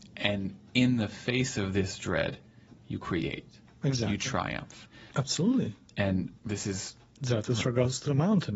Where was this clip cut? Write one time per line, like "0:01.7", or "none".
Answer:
0:05.1
0:06.4